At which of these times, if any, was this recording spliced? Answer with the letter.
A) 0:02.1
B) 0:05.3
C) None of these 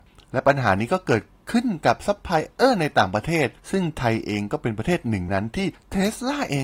B